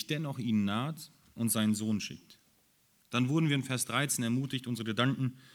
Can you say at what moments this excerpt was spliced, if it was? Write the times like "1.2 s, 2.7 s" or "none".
3.0 s